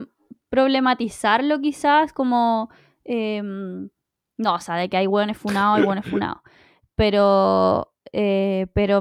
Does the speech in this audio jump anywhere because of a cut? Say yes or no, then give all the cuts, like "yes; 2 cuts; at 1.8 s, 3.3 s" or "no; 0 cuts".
no; 0 cuts